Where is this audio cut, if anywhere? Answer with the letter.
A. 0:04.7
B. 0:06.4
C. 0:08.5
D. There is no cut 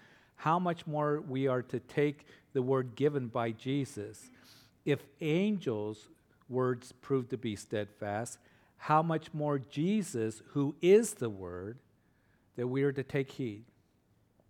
D